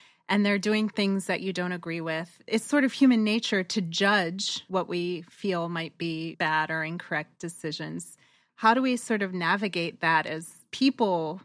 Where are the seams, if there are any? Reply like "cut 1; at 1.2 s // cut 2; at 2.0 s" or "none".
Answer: none